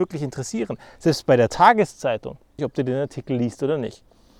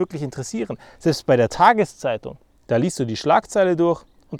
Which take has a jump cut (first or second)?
first